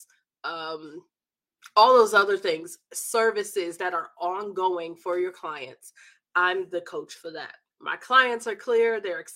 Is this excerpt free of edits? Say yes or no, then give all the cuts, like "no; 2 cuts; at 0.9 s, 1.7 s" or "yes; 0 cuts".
no; 1 cut; at 7.7 s